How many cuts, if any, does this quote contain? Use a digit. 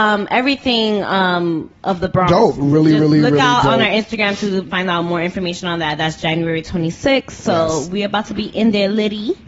2